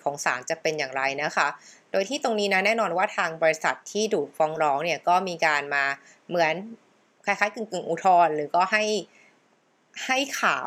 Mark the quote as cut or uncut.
uncut